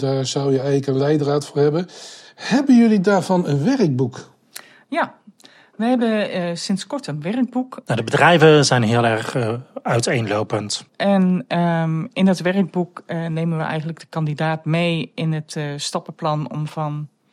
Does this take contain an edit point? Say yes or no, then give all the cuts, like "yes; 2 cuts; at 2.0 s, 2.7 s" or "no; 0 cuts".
yes; 2 cuts; at 7.8 s, 10.9 s